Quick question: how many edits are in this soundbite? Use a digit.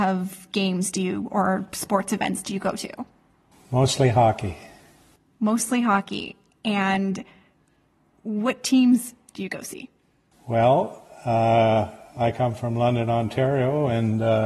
0